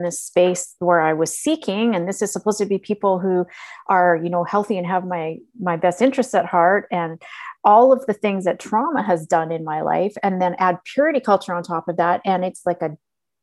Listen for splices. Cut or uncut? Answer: uncut